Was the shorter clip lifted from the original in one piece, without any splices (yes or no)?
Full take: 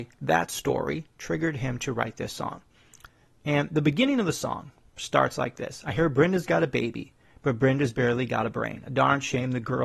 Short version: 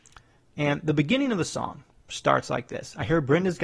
yes